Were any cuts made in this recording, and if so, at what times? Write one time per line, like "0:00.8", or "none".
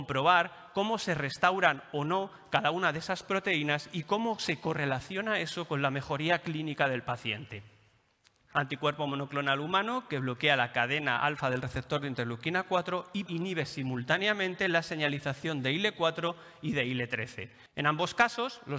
0:08.5
0:13.3
0:17.7